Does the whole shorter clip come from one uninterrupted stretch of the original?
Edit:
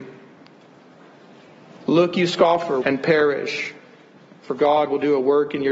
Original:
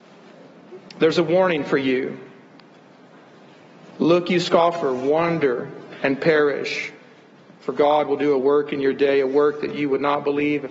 no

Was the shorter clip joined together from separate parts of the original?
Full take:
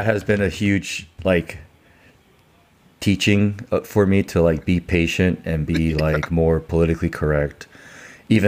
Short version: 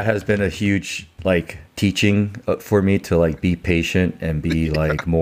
yes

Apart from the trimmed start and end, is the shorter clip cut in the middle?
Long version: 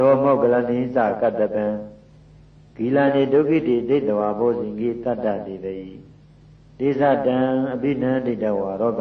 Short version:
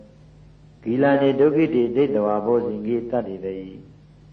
yes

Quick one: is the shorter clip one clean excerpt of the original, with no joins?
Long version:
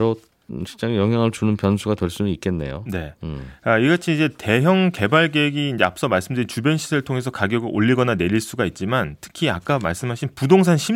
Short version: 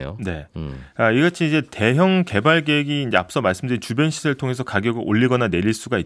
yes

